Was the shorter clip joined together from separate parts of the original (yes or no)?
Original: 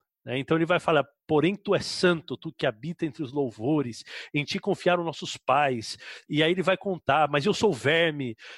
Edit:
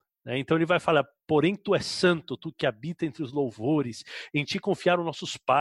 no